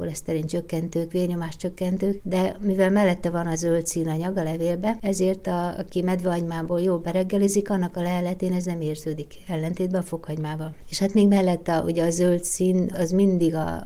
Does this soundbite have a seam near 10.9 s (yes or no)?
no